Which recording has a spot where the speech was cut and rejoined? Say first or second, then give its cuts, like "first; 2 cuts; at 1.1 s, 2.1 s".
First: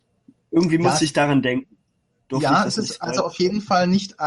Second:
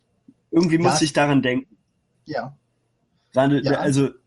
second; 1 cut; at 2.1 s